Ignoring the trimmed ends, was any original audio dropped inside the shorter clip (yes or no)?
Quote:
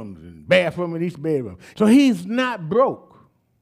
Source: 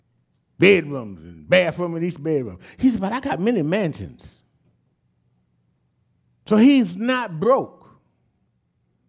yes